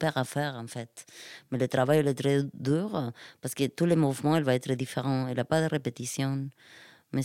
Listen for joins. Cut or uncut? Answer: uncut